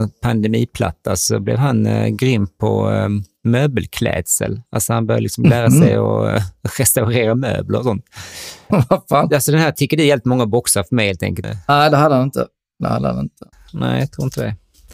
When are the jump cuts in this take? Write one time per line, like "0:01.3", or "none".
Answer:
0:08.7
0:11.4